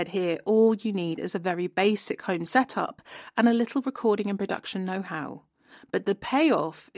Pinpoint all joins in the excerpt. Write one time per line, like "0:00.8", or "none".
none